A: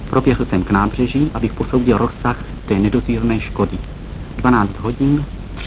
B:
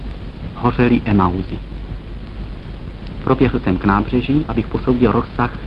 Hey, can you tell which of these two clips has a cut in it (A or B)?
A